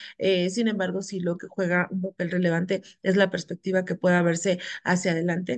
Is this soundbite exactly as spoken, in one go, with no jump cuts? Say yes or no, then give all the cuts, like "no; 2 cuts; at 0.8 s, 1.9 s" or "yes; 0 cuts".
yes; 0 cuts